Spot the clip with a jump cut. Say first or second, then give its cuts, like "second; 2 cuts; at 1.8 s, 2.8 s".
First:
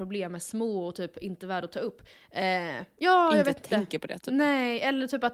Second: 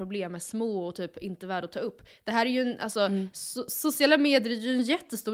first; 1 cut; at 2.1 s